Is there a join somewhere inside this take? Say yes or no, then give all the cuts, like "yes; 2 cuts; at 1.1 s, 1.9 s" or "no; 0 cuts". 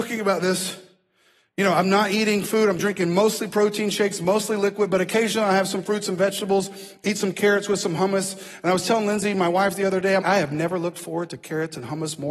yes; 1 cut; at 10.2 s